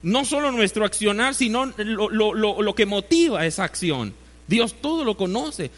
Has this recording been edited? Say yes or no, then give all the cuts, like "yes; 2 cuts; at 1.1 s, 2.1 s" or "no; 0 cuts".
no; 0 cuts